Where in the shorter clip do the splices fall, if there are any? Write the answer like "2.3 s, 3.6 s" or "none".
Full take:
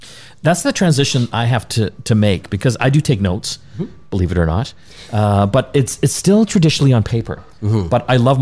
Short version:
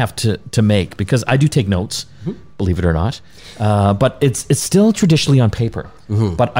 none